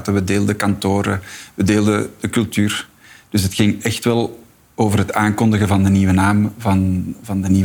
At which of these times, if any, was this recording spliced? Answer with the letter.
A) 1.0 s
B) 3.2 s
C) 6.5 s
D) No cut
D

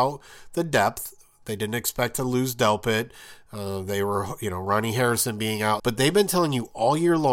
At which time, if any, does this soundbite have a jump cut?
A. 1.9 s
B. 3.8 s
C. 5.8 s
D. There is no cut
C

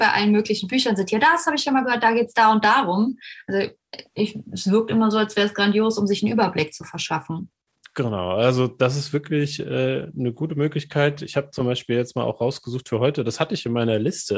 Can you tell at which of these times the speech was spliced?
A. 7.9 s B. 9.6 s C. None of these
C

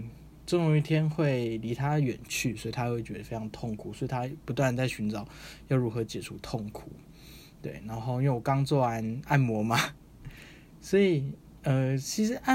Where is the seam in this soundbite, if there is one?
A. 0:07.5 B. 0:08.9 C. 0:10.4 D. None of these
D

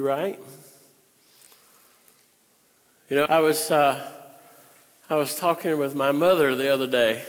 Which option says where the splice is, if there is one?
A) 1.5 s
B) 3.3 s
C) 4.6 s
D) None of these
B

